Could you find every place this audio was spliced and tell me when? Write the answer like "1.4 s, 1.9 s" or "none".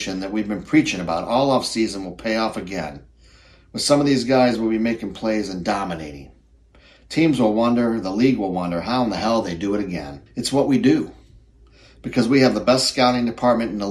10.3 s